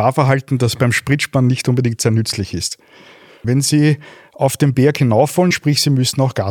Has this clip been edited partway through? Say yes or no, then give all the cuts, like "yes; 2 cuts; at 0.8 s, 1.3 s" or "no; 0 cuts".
yes; 2 cuts; at 3.4 s, 5.5 s